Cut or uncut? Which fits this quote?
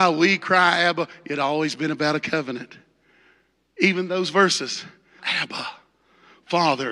cut